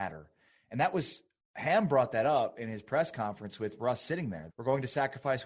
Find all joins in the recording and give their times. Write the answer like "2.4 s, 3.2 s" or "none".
4.5 s